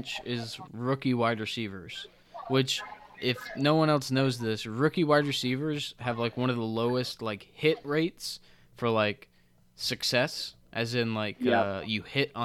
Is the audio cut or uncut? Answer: uncut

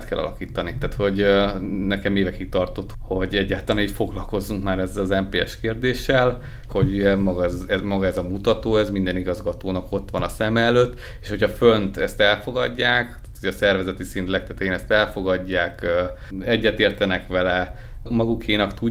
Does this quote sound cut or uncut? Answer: cut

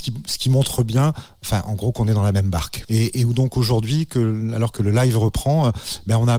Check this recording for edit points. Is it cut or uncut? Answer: cut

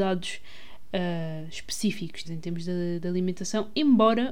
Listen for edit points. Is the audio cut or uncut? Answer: cut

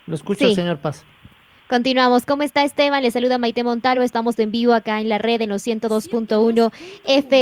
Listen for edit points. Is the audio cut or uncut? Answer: uncut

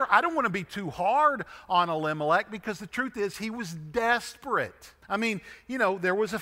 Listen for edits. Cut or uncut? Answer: cut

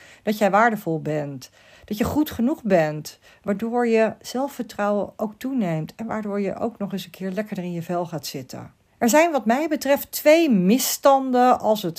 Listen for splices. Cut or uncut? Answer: cut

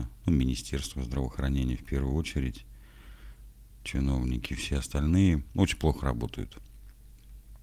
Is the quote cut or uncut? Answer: uncut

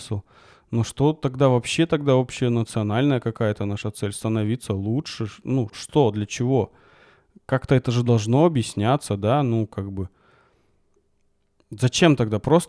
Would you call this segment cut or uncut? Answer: cut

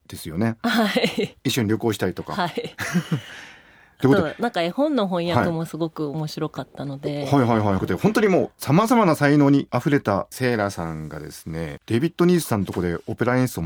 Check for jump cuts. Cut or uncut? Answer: cut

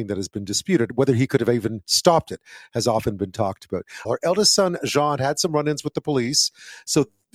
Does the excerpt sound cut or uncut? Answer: cut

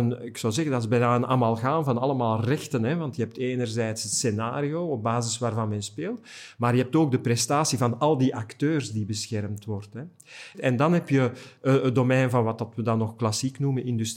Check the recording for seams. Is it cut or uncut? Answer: cut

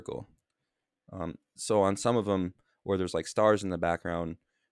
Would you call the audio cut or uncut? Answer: uncut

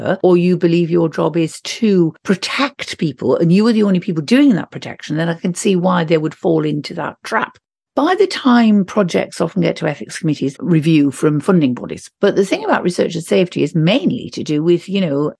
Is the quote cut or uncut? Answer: cut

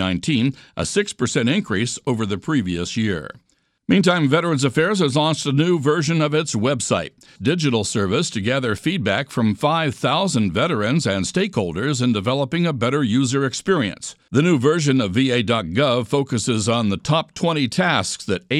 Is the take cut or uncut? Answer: cut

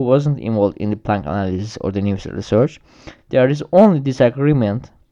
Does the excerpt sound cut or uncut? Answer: uncut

